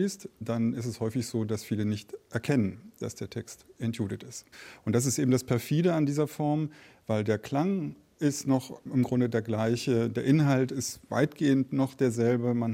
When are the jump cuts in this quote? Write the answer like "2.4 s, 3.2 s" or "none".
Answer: none